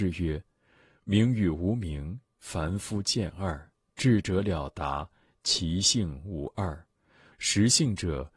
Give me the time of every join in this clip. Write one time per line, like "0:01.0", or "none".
0:07.3